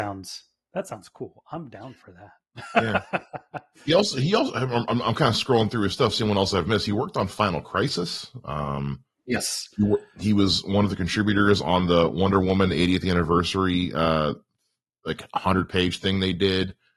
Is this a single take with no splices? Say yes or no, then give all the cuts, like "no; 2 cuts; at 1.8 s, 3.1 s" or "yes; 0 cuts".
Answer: yes; 0 cuts